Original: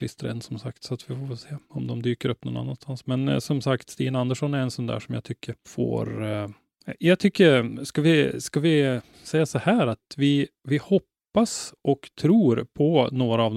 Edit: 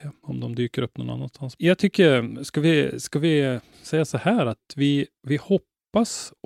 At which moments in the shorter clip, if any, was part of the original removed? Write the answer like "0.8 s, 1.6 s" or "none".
1.6 s